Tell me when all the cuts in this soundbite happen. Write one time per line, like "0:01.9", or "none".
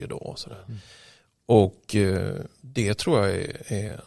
none

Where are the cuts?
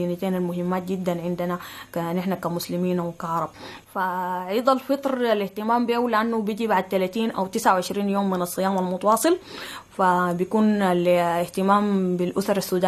0:03.8

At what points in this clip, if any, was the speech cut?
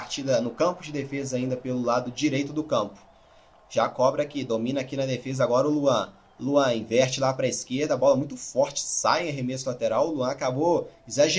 none

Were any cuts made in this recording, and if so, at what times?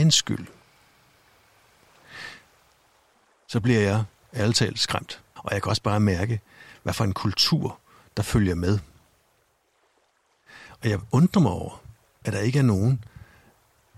0:05.4

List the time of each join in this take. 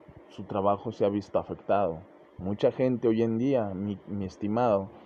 0:02.2

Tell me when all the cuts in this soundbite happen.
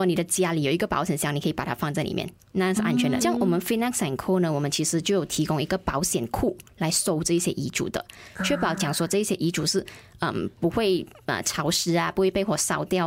0:03.2

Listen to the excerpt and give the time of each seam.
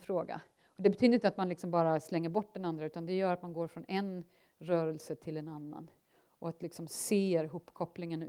none

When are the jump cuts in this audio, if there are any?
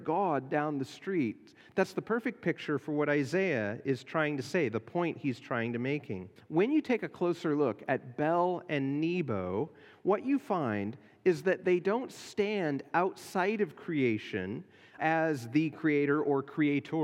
0:06.4
0:15.0

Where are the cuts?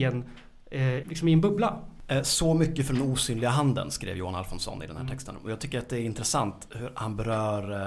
0:01.0

